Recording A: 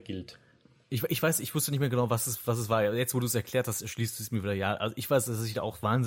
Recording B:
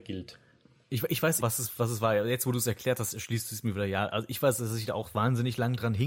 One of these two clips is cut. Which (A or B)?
B